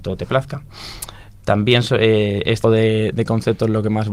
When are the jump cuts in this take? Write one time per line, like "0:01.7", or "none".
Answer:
0:02.6